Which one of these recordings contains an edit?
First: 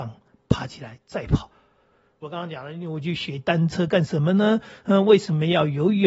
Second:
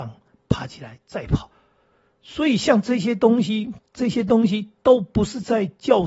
first; 1 cut; at 2.2 s

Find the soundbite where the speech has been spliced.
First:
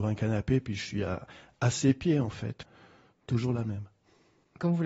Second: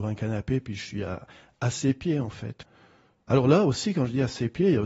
first; 1 cut; at 3.1 s

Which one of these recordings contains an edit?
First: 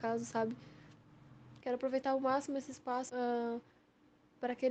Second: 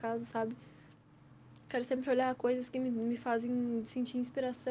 first; 2 cuts; at 1.6 s, 3.1 s

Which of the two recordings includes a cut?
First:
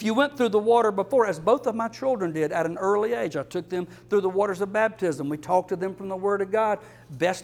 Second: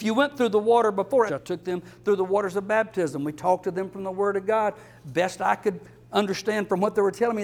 second; 1 cut; at 1.3 s

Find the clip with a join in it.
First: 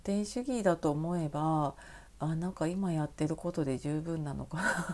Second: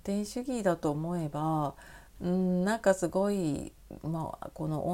second; 1 cut; at 2.2 s

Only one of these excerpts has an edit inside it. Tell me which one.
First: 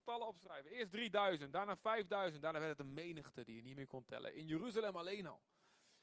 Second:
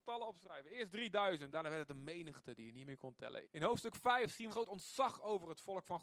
second; 3 cuts; at 1.5 s, 3.4 s, 4.5 s

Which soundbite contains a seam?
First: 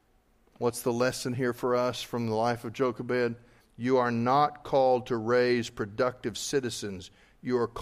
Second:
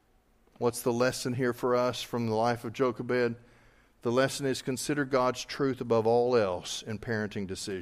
first; 1 cut; at 3.6 s

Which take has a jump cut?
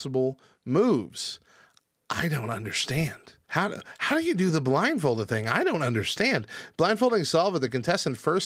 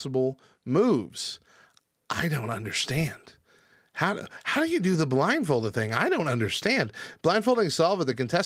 first; 1 cut; at 3.5 s

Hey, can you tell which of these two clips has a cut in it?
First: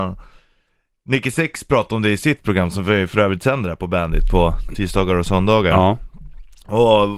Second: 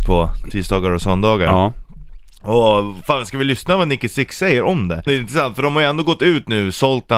second; 1 cut; at 5.1 s

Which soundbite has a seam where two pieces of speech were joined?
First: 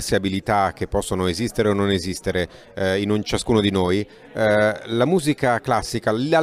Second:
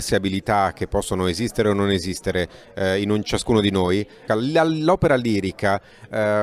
second; 1 cut; at 4.3 s

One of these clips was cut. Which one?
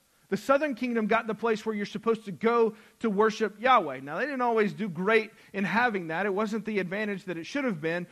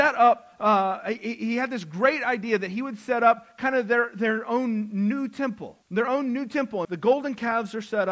second; 2 cuts; at 5.8 s, 6.8 s

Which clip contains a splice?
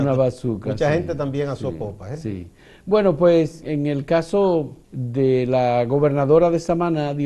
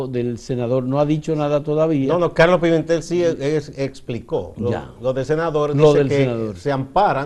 first; 2 cuts; at 3.6 s, 4.8 s

